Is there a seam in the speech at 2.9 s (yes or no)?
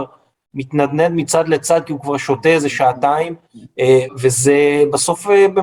no